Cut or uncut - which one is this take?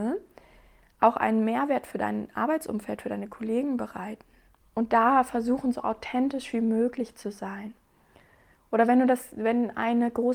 cut